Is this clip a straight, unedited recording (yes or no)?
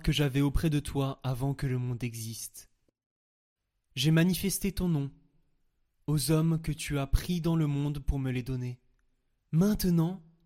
no